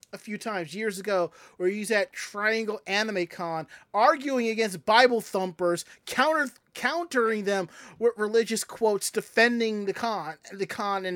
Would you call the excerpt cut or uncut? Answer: uncut